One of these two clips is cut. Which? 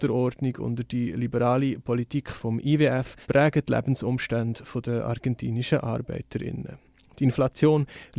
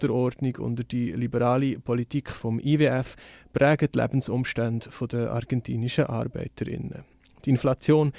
first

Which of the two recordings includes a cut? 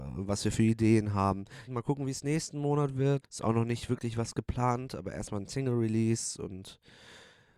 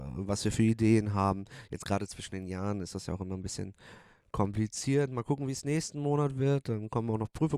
first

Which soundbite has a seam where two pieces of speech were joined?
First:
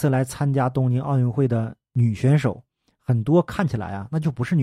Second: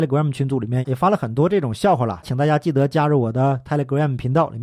second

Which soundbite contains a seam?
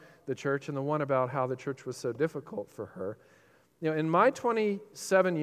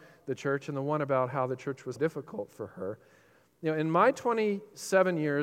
second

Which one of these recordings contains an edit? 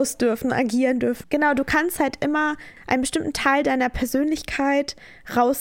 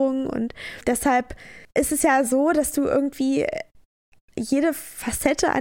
first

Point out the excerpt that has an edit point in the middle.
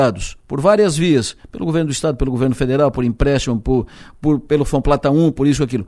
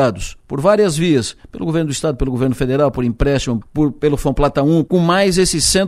second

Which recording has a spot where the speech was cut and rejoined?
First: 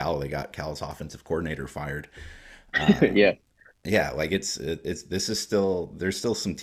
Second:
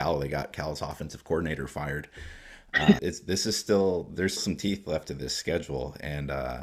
second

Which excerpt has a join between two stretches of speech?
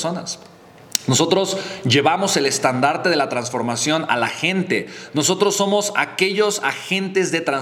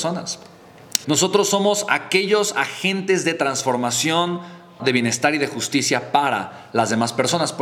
second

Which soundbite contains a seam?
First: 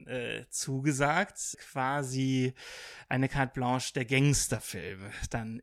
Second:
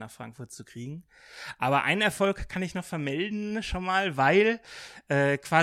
first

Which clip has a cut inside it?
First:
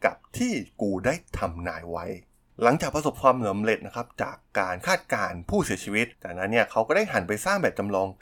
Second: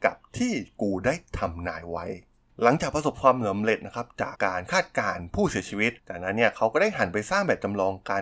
second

